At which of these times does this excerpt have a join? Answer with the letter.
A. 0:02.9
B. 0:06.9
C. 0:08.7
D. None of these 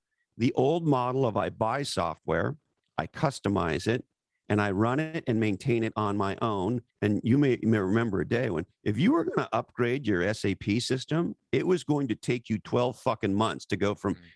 B